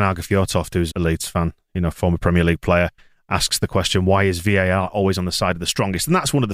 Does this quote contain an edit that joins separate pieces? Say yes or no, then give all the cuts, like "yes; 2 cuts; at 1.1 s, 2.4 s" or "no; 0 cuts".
yes; 1 cut; at 0.9 s